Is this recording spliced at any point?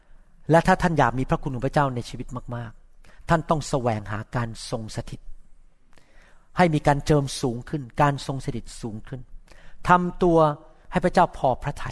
no; 0 cuts

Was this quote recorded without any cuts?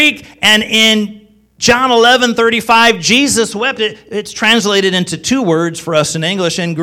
yes; 0 cuts

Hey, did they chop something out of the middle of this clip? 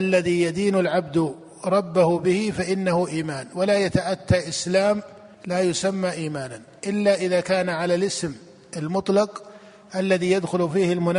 yes; 1 cut; at 5.3 s

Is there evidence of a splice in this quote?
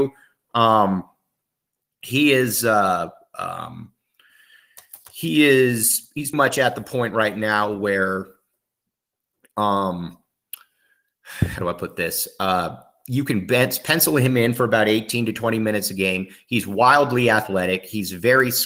yes; 1 cut; at 6.3 s

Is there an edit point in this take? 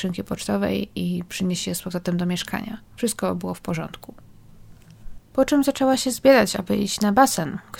yes; 1 cut; at 2.9 s

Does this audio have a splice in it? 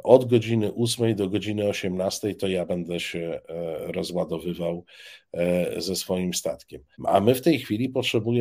yes; 1 cut; at 6.9 s

